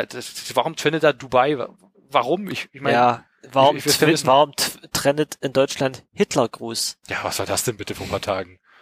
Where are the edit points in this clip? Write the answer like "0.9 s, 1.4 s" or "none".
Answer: none